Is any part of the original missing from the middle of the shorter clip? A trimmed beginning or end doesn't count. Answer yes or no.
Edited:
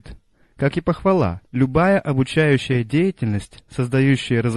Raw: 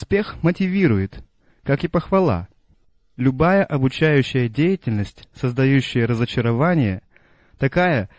yes